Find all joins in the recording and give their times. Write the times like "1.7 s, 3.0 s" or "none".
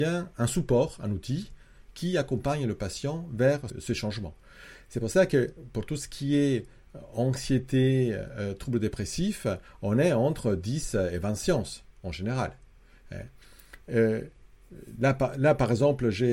3.7 s